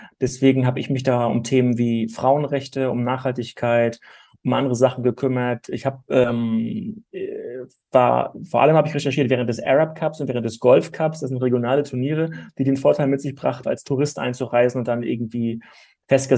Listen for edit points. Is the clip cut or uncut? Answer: cut